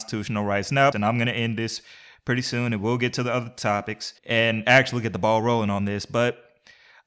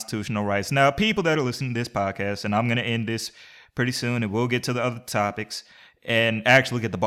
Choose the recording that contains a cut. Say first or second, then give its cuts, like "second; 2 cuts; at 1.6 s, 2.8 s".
first; 2 cuts; at 0.9 s, 4.2 s